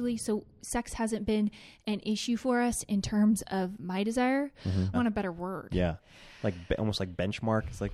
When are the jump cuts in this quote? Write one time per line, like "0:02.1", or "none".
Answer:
0:04.9